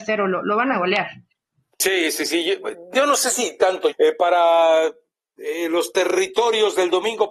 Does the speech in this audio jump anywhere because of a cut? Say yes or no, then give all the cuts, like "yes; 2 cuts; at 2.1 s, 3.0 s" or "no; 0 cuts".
yes; 1 cut; at 3.9 s